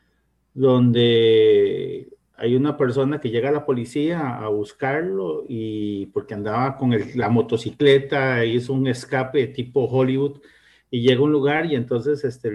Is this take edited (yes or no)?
no